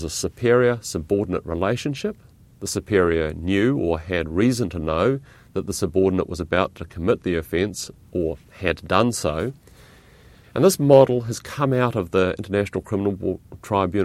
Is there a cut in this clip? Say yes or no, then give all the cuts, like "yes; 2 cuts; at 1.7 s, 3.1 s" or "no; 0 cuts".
yes; 2 cuts; at 2.5 s, 10.4 s